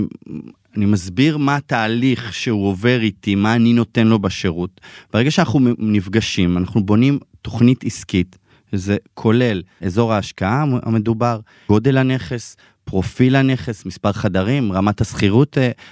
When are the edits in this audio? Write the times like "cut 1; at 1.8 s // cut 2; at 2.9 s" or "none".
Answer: none